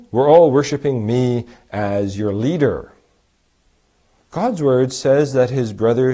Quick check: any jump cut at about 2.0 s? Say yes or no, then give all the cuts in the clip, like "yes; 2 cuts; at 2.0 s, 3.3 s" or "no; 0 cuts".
no; 1 cut; at 4.2 s